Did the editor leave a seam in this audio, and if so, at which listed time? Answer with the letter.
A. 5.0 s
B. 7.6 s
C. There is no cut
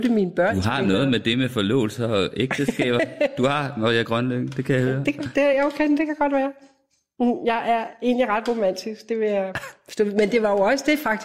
C